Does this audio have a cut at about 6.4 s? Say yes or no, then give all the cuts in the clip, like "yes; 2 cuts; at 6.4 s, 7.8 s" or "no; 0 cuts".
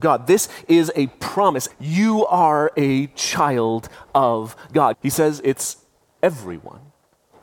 no; 2 cuts; at 1.7 s, 4.9 s